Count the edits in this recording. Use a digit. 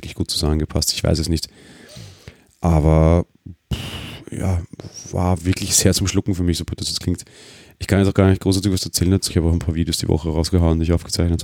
1